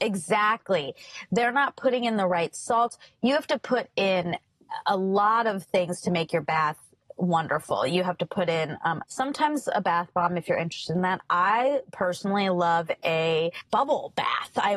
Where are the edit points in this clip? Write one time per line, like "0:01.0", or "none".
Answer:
0:09.0